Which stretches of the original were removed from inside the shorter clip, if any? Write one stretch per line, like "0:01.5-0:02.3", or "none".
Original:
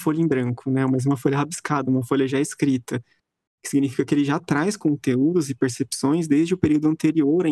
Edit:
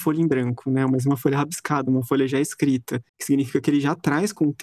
0:03.1-0:03.5